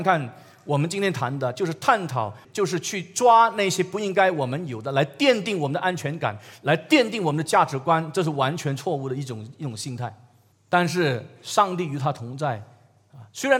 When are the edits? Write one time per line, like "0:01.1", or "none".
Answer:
0:02.4
0:10.5